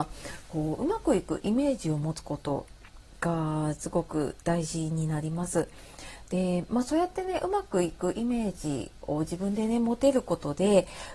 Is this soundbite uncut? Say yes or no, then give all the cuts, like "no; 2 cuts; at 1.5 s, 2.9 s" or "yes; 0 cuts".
yes; 0 cuts